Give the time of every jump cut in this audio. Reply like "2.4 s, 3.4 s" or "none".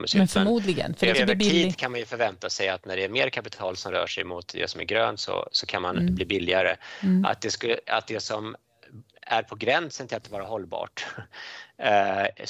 1.1 s